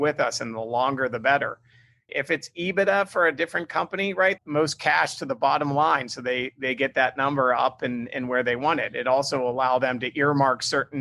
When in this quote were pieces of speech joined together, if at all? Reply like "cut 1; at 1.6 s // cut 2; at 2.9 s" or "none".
cut 1; at 2.1 s // cut 2; at 4.4 s